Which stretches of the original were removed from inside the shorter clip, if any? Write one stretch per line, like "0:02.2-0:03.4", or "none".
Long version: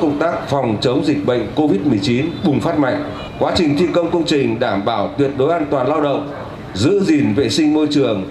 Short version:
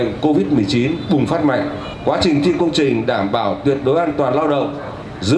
0:03.9-0:04.1